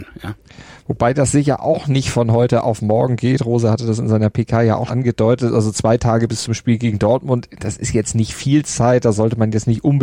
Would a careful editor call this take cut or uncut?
cut